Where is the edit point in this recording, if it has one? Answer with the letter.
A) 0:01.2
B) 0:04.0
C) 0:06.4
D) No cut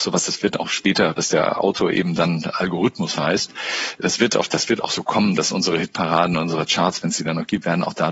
A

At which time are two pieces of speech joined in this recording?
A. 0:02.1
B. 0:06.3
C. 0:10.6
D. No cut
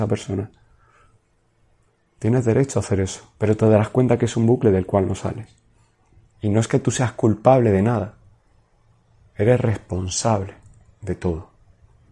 B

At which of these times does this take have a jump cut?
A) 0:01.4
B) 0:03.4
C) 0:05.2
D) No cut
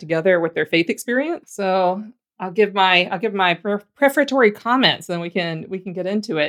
A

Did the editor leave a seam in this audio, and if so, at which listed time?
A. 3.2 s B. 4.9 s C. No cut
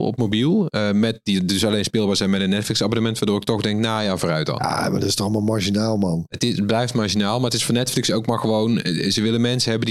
C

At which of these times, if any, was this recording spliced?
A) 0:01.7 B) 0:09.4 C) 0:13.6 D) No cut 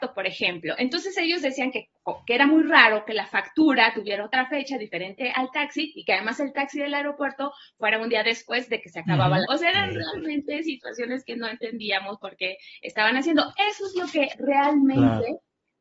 B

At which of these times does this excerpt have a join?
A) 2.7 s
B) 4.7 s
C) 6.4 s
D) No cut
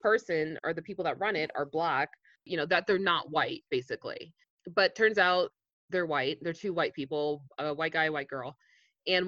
D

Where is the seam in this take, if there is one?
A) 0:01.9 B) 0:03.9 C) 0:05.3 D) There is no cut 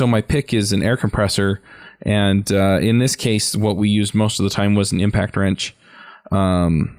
D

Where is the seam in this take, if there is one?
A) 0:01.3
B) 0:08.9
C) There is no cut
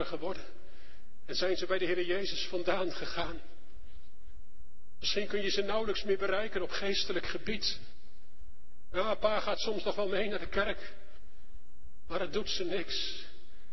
B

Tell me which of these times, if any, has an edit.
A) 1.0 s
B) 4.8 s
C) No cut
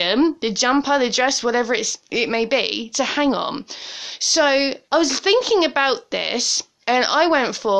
B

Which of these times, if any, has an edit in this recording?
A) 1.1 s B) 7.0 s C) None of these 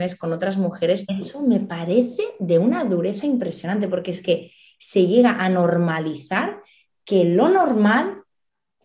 A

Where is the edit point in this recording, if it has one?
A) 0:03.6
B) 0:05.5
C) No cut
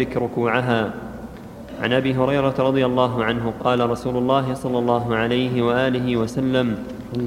A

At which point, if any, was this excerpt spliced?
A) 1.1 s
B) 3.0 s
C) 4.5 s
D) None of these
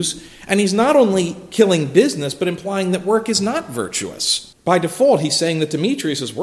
C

